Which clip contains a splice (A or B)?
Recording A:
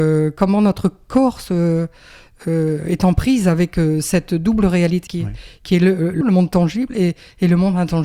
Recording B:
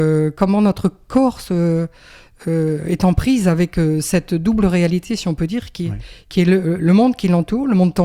A